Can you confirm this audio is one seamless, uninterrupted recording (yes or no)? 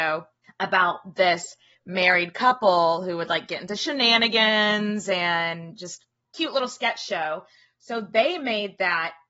yes